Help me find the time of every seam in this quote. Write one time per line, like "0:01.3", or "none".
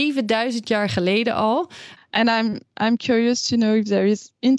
0:02.0